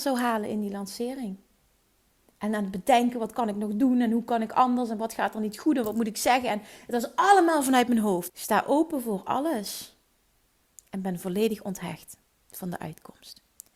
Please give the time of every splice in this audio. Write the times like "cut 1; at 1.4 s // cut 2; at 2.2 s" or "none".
cut 1; at 8.3 s